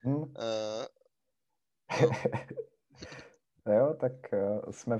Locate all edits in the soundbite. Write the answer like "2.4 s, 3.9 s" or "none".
none